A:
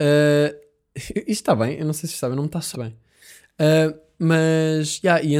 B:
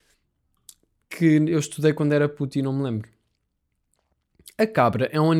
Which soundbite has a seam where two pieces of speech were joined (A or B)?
A